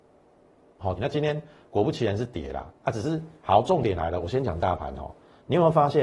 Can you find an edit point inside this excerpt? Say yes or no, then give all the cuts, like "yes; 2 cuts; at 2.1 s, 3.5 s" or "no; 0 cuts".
yes; 2 cuts; at 1.0 s, 3.4 s